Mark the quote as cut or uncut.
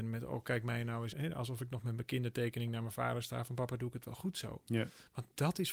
cut